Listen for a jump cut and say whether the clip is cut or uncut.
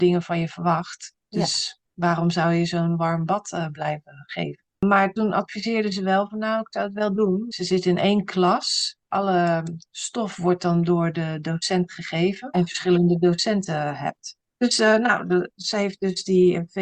cut